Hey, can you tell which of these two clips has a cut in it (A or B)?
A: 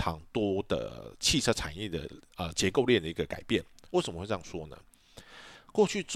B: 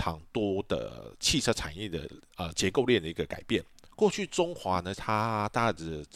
B